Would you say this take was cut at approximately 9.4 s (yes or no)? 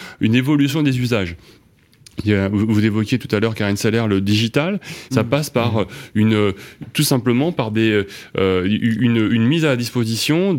no